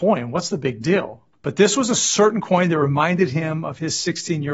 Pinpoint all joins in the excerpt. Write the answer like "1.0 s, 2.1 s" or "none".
1.3 s

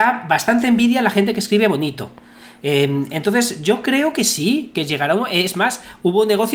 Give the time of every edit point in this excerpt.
none

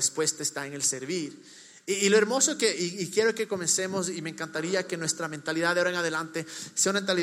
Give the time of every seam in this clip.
none

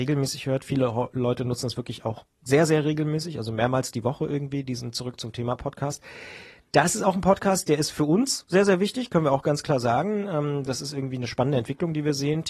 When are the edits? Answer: none

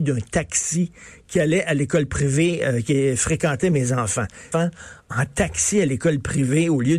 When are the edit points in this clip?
4.5 s

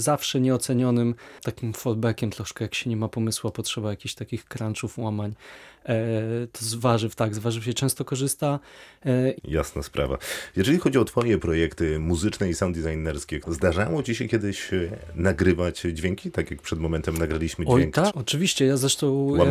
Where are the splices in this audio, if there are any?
9.4 s, 13.4 s, 18.1 s

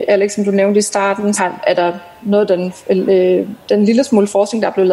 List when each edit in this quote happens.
1.4 s

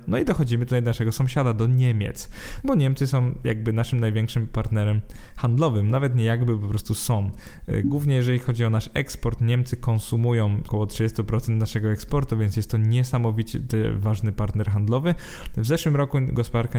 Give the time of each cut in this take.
2.6 s, 10.6 s

